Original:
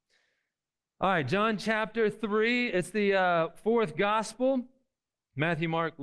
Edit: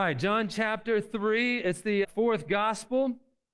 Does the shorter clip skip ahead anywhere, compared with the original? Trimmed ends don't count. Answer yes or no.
yes